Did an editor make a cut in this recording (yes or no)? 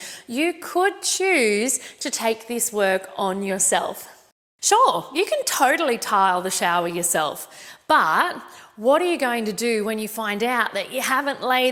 no